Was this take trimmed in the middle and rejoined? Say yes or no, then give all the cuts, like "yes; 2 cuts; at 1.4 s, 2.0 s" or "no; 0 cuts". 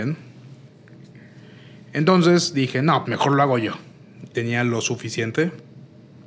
yes; 2 cuts; at 3.0 s, 4.3 s